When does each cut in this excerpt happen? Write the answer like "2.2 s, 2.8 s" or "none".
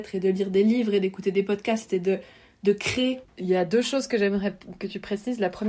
3.2 s